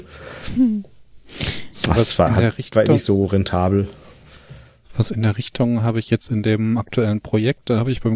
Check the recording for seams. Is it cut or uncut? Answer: uncut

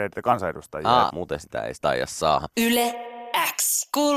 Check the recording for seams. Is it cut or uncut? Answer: cut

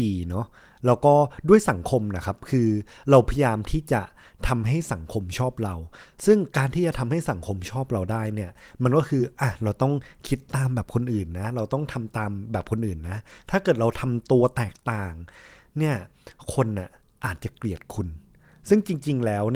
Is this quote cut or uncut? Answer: uncut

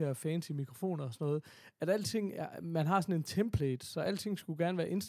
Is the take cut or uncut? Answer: uncut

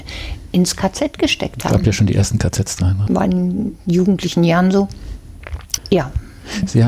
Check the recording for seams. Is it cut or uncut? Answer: cut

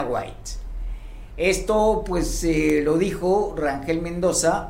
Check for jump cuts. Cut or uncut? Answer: uncut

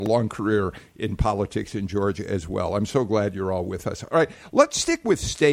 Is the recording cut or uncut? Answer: uncut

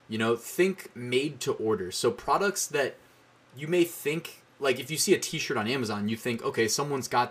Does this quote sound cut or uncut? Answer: uncut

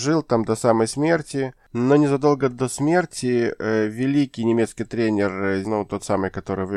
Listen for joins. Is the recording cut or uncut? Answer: cut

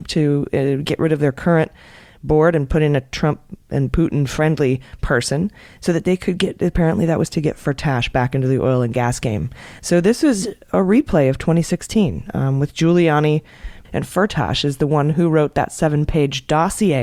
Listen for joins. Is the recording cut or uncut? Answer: cut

